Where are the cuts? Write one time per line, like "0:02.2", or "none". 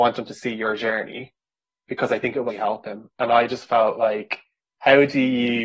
0:02.5